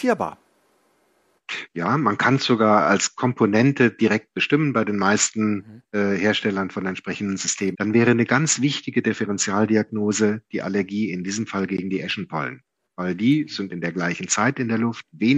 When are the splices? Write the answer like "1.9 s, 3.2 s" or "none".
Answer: 7.7 s